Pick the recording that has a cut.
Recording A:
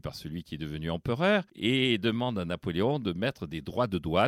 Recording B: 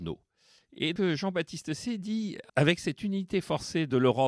B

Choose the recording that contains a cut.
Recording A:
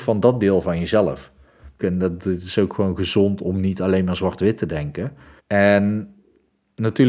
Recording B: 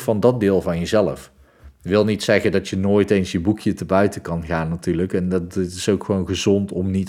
A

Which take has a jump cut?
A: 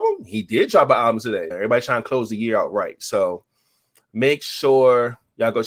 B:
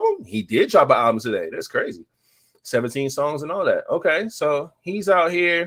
A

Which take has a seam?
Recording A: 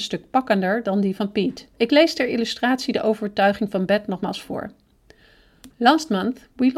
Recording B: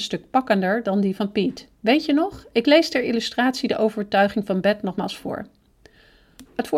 A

